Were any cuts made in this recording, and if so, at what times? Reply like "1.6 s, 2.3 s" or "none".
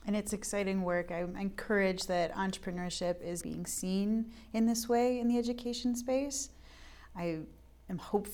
3.4 s

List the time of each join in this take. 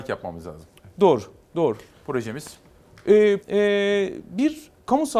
3.4 s

